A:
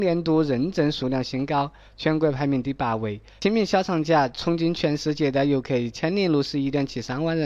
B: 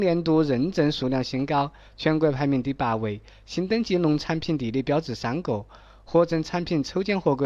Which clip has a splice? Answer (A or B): A